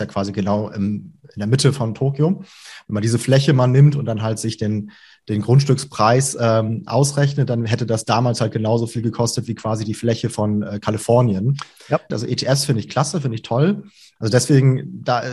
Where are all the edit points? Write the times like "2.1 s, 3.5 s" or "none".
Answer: 12.1 s, 14.2 s